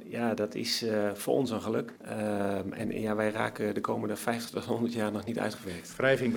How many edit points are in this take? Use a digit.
1